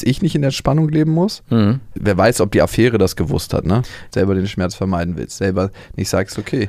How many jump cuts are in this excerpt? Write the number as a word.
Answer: two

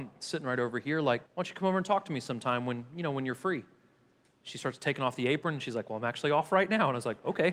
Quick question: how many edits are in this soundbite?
one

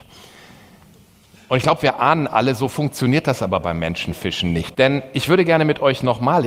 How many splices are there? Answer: one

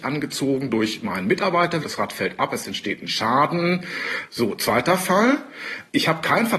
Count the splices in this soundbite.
two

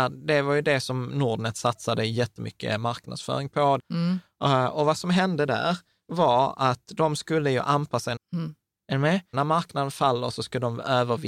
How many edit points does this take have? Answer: three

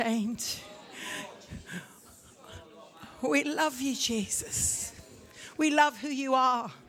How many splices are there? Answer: zero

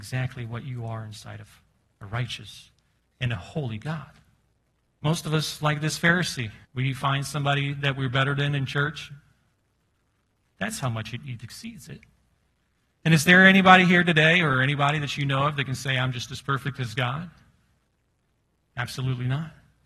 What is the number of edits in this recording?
three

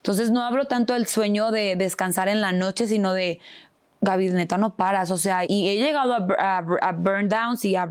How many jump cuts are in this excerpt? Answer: one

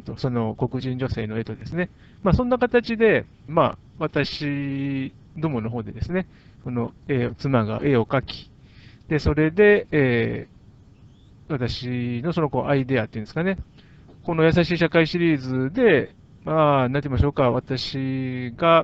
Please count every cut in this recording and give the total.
two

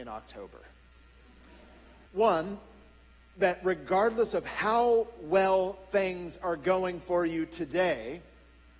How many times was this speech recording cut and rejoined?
one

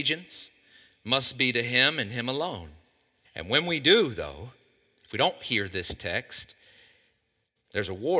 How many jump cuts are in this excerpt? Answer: one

